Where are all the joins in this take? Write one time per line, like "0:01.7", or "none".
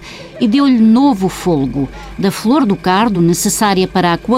none